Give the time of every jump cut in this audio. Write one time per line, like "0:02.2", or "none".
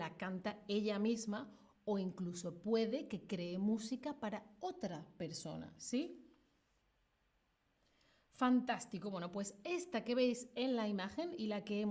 none